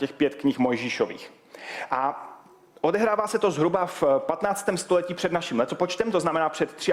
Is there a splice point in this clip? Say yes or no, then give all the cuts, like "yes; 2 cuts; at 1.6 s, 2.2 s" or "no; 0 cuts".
no; 0 cuts